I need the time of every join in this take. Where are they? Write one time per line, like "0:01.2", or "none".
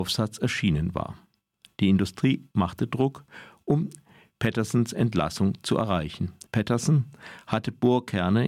0:06.5